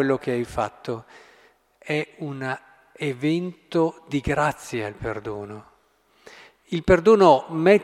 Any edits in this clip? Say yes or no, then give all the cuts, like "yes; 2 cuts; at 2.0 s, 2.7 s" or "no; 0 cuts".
no; 0 cuts